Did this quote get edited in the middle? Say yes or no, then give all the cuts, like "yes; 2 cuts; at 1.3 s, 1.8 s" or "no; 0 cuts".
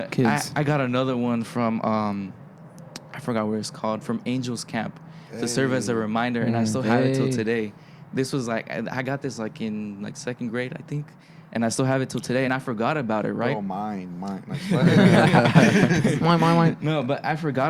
no; 0 cuts